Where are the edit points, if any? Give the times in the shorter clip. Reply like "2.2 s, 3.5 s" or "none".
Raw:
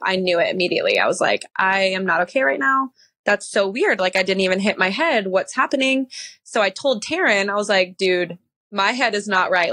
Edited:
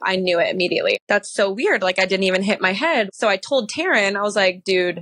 0.9 s, 3.1 s